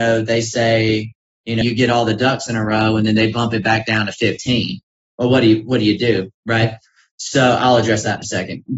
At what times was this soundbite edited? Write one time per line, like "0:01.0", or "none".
0:01.6